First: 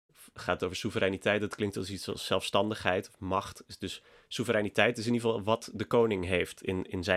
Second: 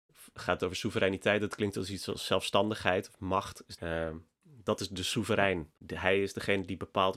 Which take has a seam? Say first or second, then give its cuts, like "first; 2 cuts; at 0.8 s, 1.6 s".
second; 2 cuts; at 3.8 s, 5.8 s